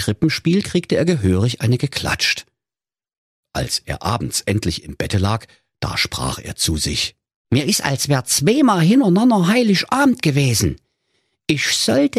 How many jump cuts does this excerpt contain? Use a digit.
1